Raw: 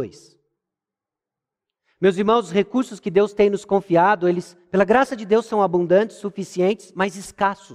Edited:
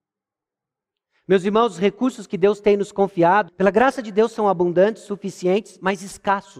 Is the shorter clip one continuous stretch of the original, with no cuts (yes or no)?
no